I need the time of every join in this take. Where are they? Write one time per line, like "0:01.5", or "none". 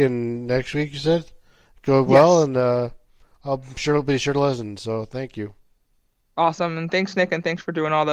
none